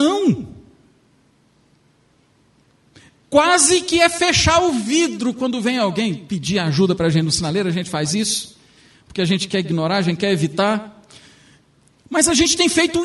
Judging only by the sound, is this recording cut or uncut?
uncut